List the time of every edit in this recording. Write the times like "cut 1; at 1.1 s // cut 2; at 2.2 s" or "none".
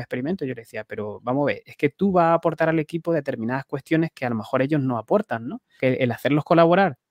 cut 1; at 5.8 s